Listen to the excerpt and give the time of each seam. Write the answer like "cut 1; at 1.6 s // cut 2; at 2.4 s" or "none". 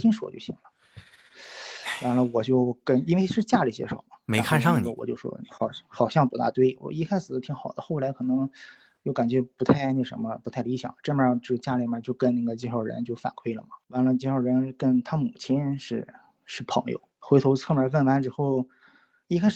cut 1; at 13.8 s // cut 2; at 17.1 s